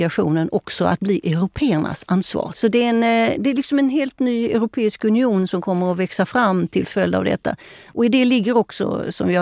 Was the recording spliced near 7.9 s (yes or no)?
no